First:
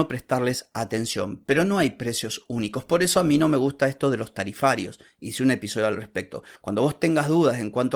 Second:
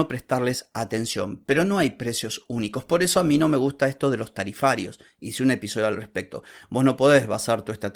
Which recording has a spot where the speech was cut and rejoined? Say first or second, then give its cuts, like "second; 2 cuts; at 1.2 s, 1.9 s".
first; 1 cut; at 6.6 s